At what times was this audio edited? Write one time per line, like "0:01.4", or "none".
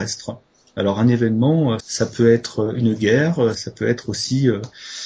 0:01.8
0:03.5